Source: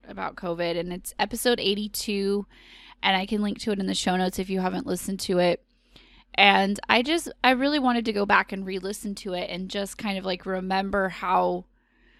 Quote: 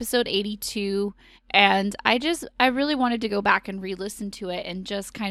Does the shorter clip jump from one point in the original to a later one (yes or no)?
yes